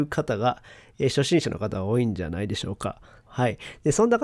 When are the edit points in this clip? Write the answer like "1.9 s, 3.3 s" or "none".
3.3 s